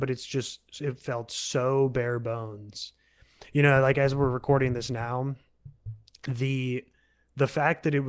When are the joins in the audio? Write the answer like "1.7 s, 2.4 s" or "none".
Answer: none